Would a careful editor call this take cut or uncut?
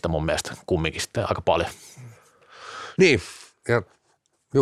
uncut